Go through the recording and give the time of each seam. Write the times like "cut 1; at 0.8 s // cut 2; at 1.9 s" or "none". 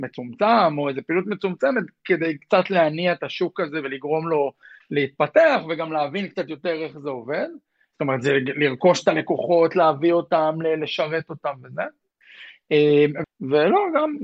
cut 1; at 7.9 s // cut 2; at 13.2 s

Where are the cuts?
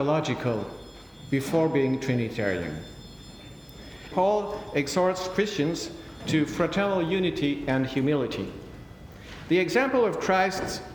cut 1; at 4.1 s

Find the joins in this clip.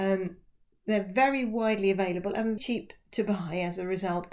cut 1; at 2.6 s

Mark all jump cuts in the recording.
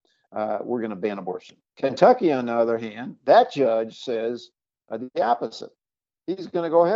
none

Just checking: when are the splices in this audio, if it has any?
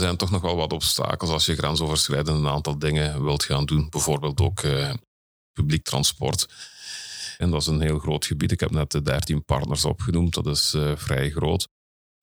cut 1; at 7.4 s

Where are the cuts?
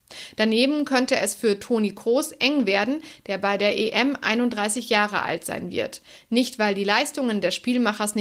none

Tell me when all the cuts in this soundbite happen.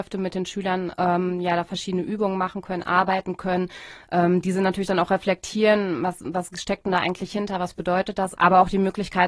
cut 1; at 8.4 s

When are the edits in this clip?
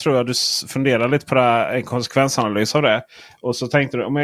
none

